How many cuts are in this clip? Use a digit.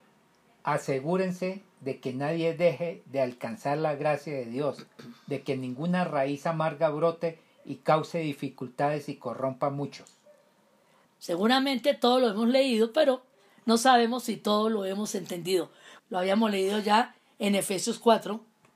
2